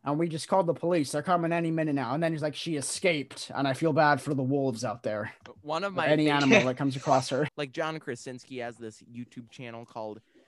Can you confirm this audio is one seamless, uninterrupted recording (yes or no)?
no